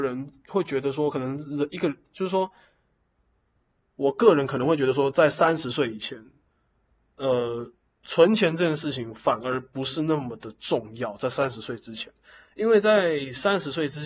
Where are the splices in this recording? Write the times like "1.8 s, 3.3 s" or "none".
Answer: none